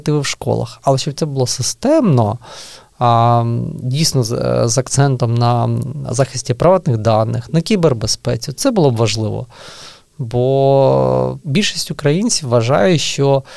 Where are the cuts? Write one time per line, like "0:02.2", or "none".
0:11.4